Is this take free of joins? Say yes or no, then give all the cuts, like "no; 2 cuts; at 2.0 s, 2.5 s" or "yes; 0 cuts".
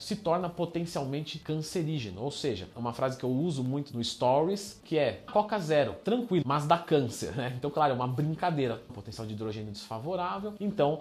no; 3 cuts; at 5.3 s, 6.4 s, 8.9 s